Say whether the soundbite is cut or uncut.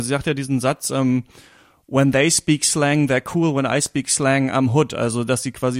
uncut